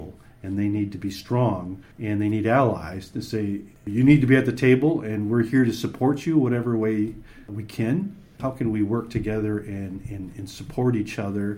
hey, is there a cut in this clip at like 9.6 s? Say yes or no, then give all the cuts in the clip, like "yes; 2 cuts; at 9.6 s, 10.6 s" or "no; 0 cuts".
no; 2 cuts; at 1.9 s, 8.4 s